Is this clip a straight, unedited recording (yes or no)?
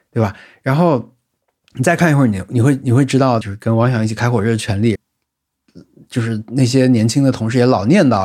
no